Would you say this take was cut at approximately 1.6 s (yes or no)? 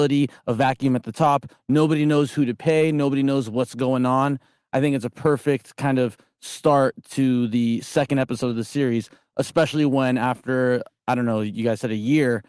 no